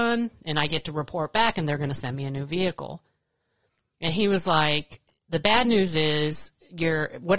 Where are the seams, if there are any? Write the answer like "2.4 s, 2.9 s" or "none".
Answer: none